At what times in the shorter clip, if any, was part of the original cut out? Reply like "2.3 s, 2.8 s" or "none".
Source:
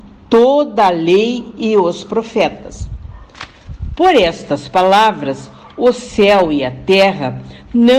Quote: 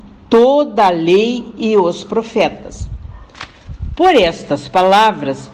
none